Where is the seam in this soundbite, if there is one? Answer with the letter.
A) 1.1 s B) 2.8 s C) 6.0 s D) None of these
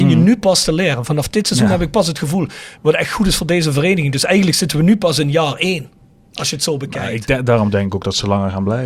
B